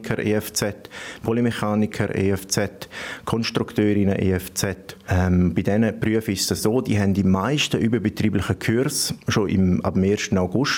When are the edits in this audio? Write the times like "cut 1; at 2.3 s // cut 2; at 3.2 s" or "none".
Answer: none